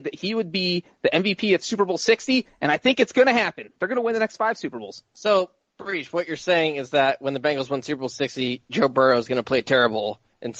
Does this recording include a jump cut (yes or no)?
no